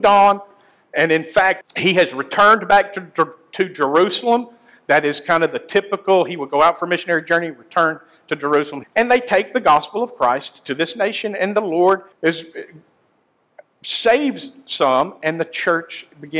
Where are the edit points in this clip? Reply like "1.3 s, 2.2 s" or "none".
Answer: 1.6 s, 8.8 s, 12.1 s